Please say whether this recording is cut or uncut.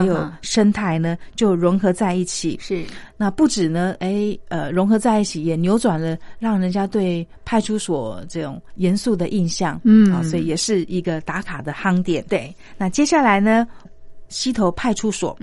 cut